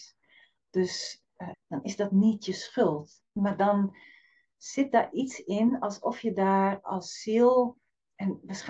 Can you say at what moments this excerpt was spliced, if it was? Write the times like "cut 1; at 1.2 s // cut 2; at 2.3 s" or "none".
cut 1; at 1.5 s // cut 2; at 3.2 s